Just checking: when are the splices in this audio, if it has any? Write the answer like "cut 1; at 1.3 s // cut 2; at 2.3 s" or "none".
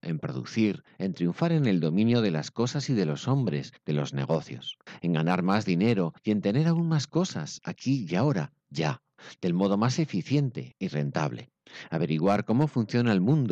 none